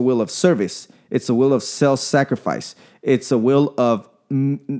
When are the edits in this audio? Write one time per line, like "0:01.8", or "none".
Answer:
none